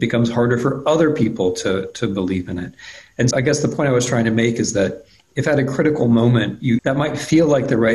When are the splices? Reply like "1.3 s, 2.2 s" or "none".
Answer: 3.3 s, 6.8 s